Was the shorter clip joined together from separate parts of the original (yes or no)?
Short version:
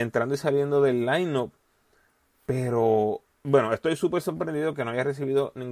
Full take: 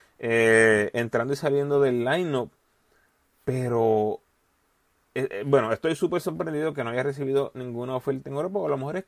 yes